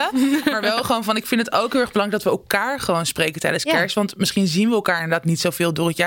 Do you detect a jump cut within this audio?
no; 0 cuts

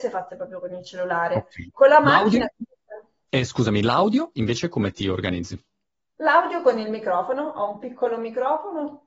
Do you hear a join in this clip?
yes; 2 cuts; at 1.7 s, 3.3 s

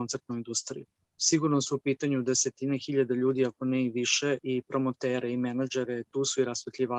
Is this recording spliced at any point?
yes; 1 cut; at 4.4 s

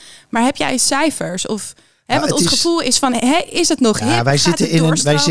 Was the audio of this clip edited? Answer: no; 0 cuts

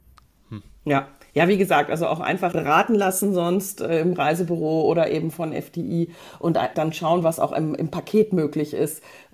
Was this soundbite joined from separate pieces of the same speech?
yes; 2 cuts; at 2.5 s, 6.7 s

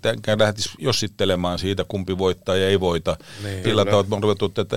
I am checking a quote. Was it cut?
yes; 1 cut; at 3.6 s

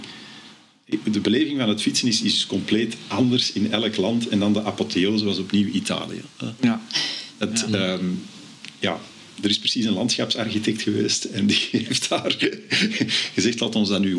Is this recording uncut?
yes; 0 cuts

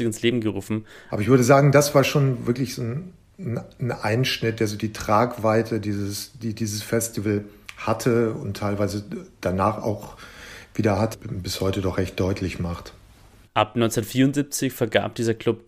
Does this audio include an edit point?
yes; 2 cuts; at 1.1 s, 13.5 s

